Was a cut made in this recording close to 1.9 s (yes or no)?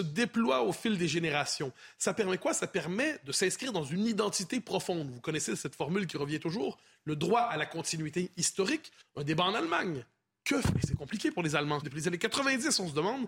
no